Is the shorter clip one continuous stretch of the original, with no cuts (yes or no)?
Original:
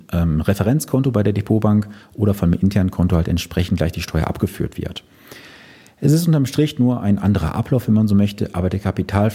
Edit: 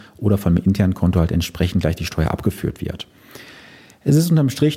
yes